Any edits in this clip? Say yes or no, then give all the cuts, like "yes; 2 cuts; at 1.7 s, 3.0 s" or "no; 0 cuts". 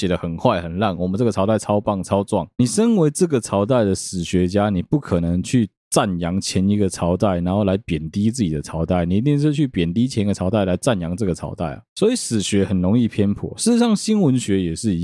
no; 0 cuts